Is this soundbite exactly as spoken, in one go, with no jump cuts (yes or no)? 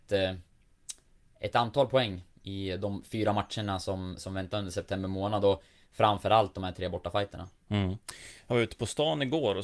yes